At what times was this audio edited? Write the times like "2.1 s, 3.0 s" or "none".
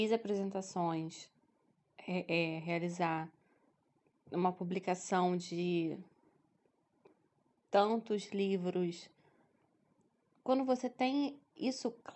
none